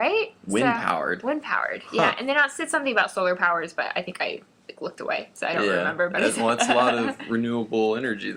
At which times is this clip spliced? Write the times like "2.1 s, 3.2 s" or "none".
none